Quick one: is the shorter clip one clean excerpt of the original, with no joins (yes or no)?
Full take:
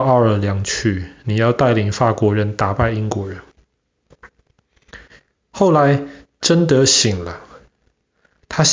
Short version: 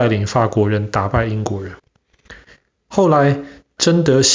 no